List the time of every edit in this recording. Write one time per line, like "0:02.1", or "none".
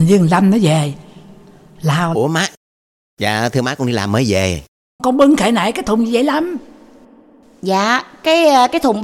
0:02.1
0:05.0